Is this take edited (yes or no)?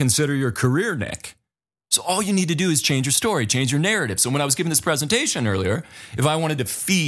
yes